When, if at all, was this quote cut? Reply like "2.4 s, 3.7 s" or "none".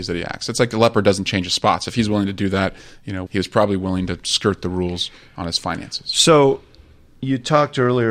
3.3 s

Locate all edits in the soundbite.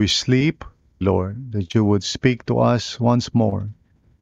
1.0 s

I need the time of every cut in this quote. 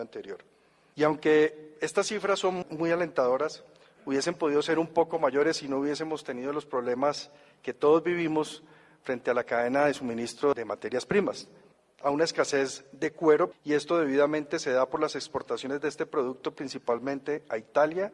12.0 s, 13.5 s

